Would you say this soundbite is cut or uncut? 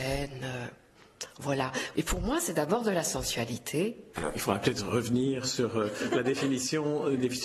cut